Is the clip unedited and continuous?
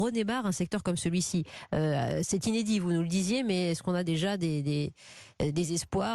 yes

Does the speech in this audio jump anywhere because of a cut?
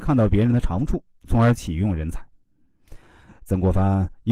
yes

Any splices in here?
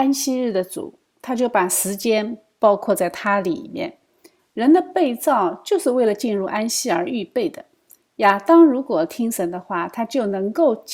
yes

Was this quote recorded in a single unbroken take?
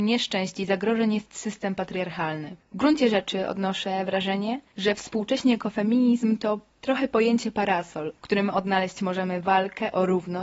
no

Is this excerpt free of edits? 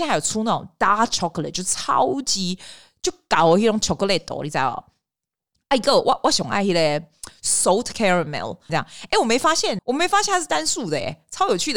no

